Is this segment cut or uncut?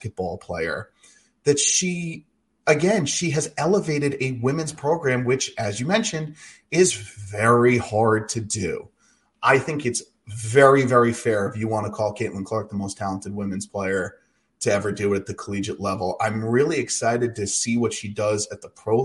uncut